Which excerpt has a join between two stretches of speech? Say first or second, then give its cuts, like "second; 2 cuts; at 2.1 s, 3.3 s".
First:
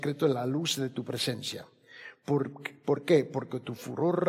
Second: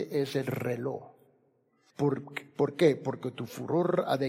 second; 1 cut; at 1.9 s